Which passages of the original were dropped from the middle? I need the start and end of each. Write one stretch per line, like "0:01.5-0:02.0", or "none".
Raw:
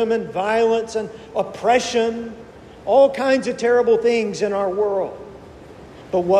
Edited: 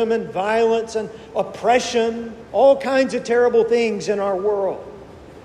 0:02.5-0:02.8